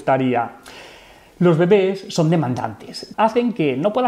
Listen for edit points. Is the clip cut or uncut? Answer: cut